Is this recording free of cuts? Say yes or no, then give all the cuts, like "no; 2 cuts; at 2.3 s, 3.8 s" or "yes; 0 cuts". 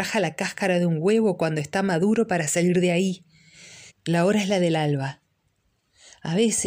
no; 1 cut; at 3.9 s